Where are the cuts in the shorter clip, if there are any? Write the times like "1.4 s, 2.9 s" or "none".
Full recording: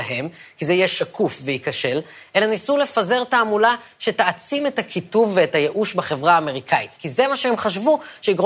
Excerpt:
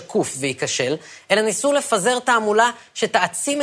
none